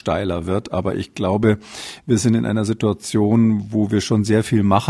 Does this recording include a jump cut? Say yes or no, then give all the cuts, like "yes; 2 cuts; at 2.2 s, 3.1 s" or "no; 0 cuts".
no; 0 cuts